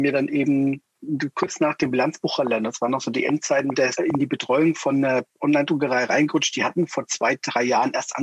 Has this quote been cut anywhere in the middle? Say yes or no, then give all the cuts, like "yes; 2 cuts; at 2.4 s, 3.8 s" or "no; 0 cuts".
yes; 1 cut; at 4.0 s